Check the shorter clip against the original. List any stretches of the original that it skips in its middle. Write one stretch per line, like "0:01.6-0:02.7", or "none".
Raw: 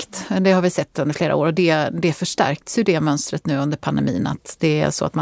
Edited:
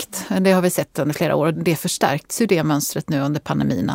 0:01.5-0:01.9